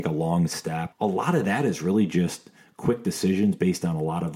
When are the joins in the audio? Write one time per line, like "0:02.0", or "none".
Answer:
0:00.9